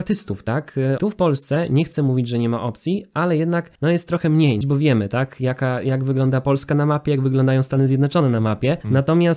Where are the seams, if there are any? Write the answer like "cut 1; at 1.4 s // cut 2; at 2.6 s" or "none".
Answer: cut 1; at 1.0 s // cut 2; at 4.6 s